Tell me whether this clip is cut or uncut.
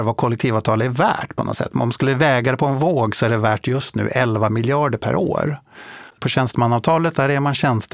cut